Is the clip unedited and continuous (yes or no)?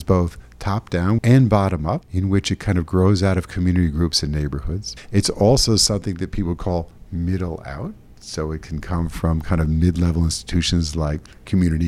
no